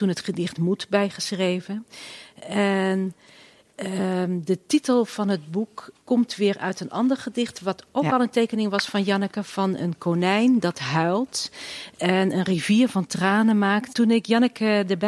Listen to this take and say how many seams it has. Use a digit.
2